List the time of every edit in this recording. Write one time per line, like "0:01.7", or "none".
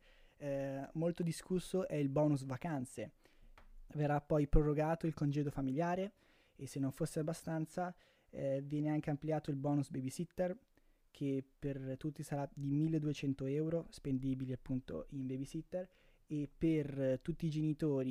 0:03.9